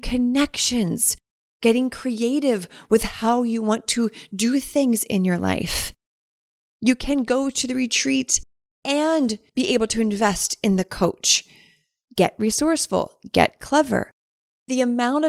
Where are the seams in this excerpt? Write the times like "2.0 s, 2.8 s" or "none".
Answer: none